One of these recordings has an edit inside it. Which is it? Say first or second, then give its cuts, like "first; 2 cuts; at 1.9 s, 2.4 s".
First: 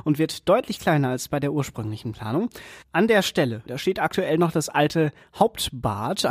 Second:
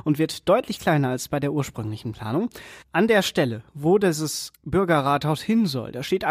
first; 1 cut; at 3.7 s